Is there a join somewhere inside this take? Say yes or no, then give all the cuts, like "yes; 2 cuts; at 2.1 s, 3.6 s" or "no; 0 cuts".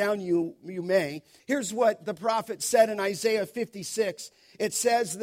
yes; 1 cut; at 1.4 s